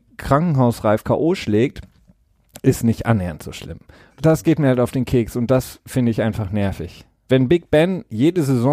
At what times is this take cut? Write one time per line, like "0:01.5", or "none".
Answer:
0:04.1
0:07.3